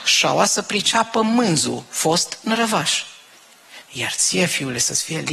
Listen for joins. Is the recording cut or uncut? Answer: cut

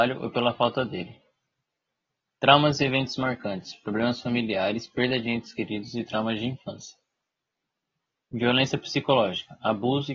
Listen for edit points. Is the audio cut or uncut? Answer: uncut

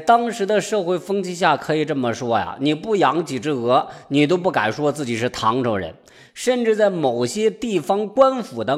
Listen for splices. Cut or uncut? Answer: uncut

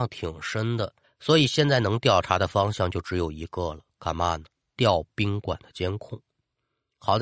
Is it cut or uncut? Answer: cut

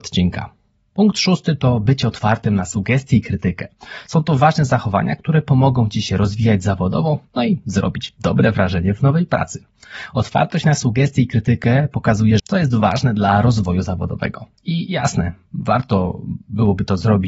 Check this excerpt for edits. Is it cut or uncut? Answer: cut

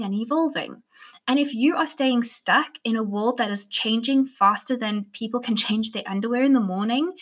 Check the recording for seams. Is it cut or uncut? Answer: uncut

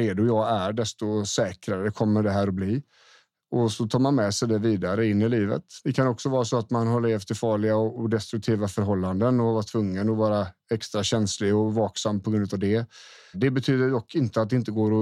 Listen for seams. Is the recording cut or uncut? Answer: cut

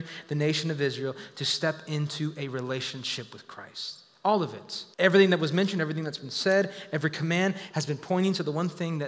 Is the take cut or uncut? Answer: cut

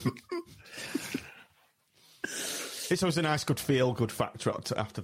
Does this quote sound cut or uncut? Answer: uncut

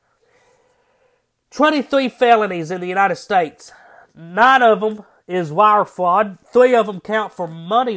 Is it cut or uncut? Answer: cut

